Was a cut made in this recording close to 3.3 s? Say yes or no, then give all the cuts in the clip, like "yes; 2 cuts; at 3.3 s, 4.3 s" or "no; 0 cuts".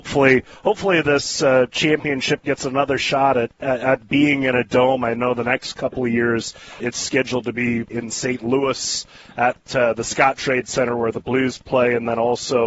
no; 2 cuts; at 6.8 s, 7.9 s